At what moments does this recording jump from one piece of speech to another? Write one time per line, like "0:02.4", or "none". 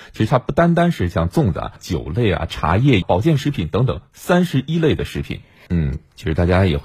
0:01.8
0:03.0
0:05.7